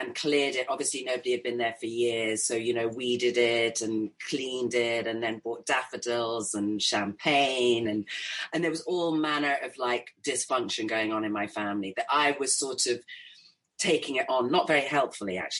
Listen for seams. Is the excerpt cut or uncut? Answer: uncut